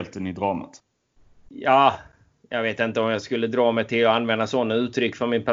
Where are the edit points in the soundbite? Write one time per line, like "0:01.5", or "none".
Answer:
none